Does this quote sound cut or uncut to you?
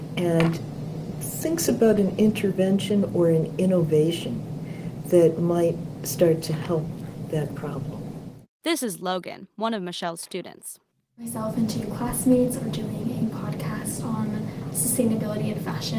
uncut